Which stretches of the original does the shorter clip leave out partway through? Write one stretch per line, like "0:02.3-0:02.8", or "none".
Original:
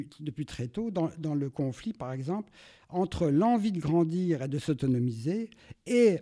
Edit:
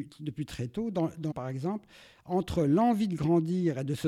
0:01.3-0:01.9